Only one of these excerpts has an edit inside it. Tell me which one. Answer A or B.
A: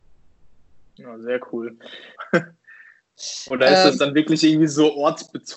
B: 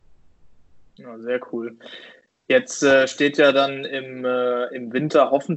A